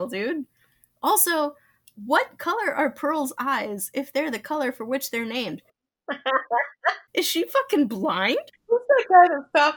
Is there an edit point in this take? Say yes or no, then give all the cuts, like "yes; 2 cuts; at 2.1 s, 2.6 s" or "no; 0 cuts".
yes; 2 cuts; at 7.1 s, 8.5 s